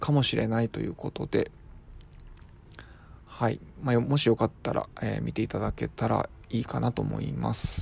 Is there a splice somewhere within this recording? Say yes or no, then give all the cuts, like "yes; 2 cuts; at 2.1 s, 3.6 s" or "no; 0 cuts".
no; 0 cuts